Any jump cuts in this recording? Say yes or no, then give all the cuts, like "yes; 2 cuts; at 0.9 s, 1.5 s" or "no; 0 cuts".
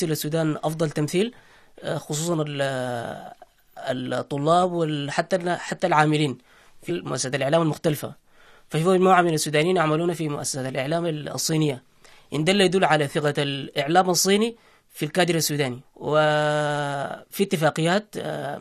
yes; 1 cut; at 6.9 s